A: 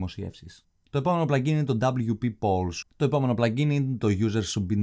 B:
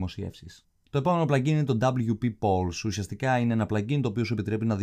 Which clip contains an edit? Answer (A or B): A